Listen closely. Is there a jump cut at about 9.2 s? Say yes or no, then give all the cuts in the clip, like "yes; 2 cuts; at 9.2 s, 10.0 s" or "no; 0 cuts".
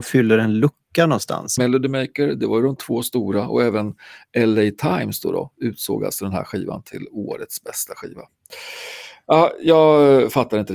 no; 1 cut; at 1.6 s